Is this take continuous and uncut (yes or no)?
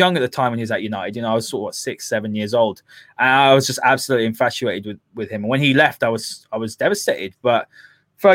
yes